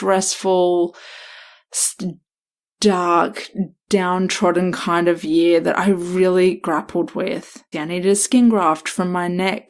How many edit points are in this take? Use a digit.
1